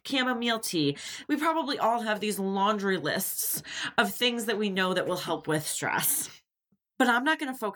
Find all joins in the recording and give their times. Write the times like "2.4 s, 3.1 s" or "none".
1.2 s